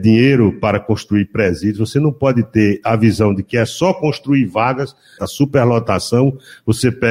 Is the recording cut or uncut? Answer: cut